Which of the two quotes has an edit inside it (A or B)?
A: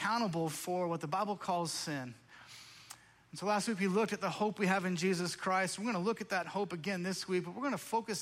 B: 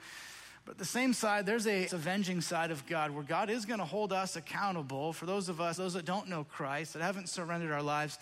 B